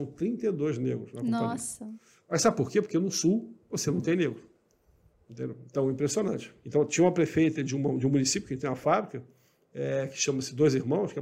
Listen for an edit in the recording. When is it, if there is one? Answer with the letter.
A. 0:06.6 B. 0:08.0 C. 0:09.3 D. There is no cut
A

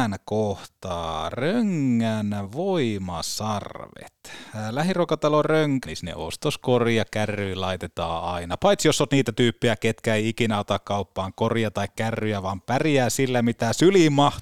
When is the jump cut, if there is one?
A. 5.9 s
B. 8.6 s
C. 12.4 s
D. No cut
A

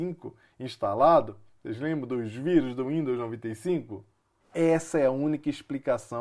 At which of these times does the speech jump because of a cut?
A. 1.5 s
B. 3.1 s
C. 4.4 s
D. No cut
C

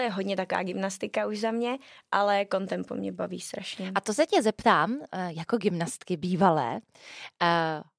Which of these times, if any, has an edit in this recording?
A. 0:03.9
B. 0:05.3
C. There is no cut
C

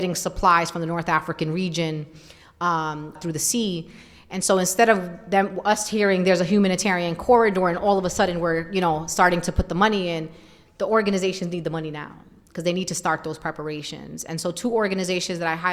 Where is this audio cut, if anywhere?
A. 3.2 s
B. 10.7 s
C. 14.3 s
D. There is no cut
A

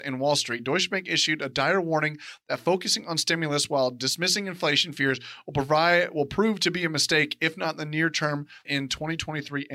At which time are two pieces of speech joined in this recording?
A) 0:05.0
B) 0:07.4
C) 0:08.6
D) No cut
C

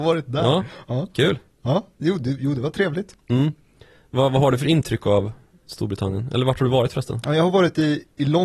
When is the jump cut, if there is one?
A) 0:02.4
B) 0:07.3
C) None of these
C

